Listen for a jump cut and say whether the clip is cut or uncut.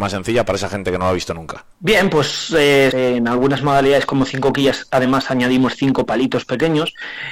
cut